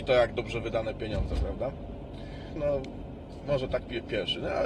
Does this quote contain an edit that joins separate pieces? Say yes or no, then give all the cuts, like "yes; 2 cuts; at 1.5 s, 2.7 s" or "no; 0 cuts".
yes; 1 cut; at 2.6 s